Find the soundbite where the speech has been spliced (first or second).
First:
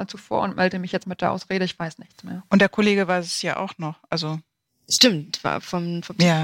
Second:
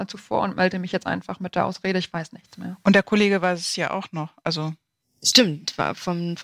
first